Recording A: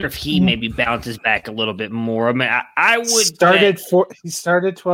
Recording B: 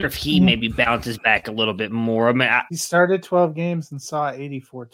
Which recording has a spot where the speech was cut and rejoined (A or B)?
B